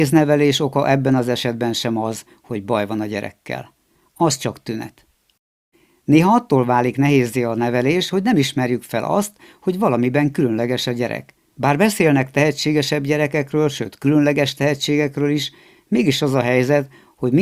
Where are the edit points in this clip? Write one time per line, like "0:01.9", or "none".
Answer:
0:11.5